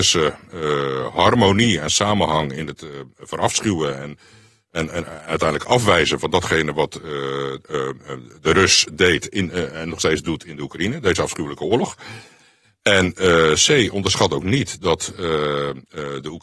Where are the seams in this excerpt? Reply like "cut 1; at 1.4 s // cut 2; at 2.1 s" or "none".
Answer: none